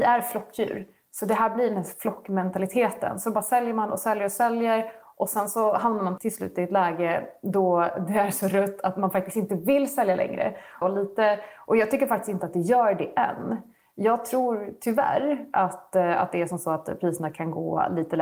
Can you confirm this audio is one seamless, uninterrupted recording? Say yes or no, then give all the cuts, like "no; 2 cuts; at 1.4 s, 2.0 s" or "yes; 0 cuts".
no; 2 cuts; at 6.2 s, 10.8 s